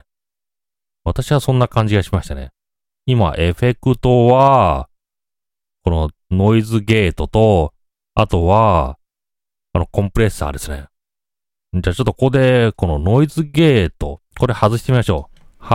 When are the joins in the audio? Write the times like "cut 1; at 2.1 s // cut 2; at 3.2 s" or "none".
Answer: cut 1; at 12.1 s // cut 2; at 14.3 s